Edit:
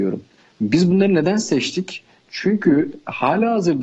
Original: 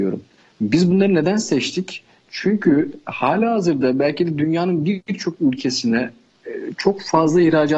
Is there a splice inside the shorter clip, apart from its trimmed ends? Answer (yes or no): no